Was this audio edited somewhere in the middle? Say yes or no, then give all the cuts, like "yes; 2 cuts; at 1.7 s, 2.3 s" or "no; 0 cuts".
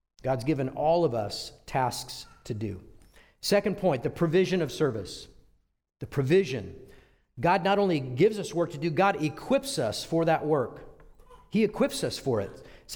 no; 0 cuts